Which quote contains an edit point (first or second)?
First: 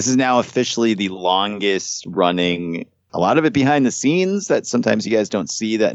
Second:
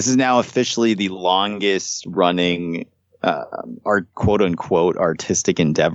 first